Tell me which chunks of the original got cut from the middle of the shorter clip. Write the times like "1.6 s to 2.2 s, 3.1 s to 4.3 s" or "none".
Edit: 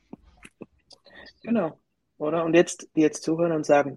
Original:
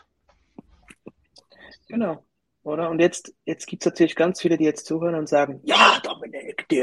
3.4 s to 4.6 s